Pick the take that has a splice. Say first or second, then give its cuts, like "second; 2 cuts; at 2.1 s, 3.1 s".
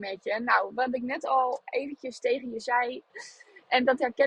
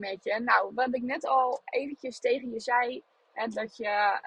first; 1 cut; at 3.1 s